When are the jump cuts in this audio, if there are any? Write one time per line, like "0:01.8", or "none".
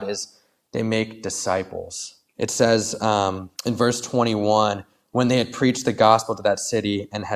0:02.3
0:03.5